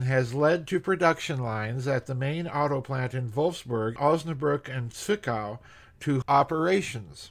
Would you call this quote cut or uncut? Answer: cut